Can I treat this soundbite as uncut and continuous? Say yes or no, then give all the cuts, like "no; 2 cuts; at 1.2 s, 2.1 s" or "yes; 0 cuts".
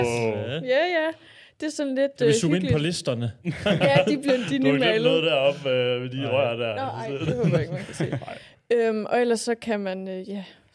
yes; 0 cuts